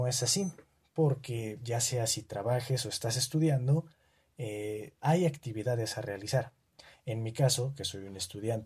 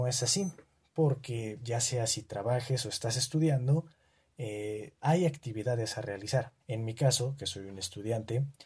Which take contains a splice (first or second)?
second